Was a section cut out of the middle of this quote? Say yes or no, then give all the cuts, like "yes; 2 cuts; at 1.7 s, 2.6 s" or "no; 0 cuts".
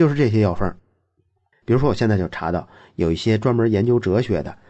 yes; 1 cut; at 1.5 s